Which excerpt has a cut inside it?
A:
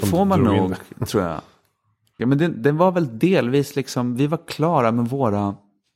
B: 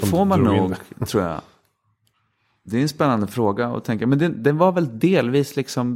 A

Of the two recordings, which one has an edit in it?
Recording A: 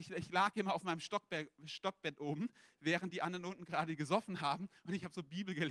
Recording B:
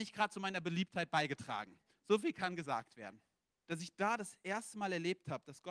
B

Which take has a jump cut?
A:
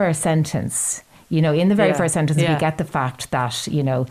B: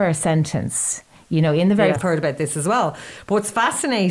B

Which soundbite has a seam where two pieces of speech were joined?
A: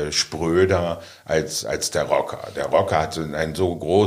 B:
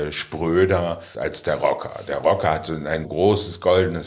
B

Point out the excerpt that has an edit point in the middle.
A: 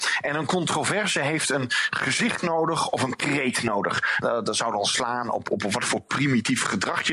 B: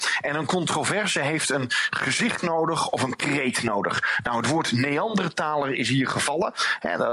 A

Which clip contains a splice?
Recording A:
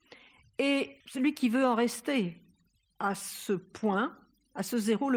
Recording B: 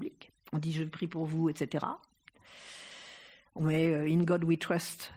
A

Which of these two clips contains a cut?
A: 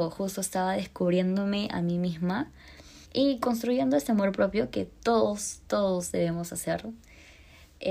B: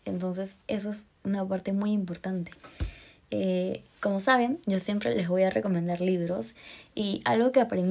A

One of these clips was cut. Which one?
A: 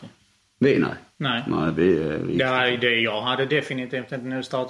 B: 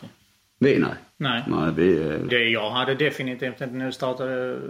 B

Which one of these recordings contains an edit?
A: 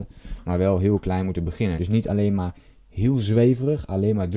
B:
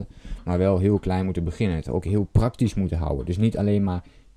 A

